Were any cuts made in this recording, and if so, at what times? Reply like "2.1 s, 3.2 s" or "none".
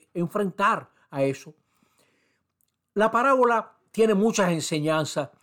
3.9 s